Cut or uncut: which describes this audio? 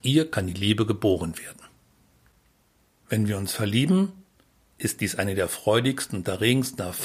uncut